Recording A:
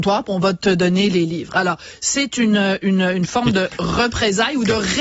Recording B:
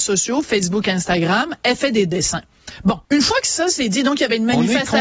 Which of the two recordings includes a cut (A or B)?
B